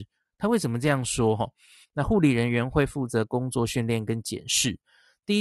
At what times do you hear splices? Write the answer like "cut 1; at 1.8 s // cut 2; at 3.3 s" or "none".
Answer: cut 1; at 1.8 s